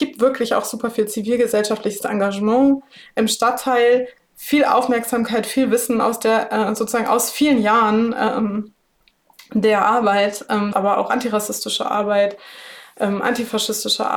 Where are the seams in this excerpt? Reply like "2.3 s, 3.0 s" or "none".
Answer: 10.7 s